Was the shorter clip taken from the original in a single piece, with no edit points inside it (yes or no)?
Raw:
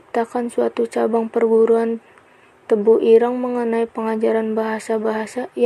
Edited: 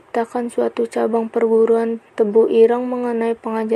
no